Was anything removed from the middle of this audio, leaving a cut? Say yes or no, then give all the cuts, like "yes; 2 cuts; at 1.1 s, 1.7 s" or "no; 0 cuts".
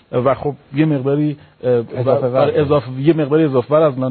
no; 0 cuts